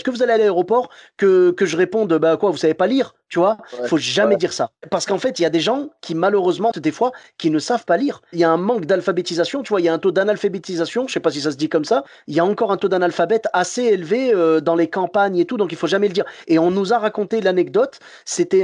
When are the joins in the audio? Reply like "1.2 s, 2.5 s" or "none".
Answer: 6.7 s